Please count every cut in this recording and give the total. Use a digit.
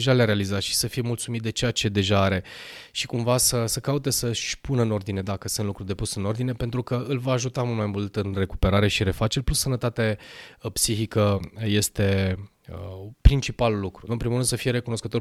1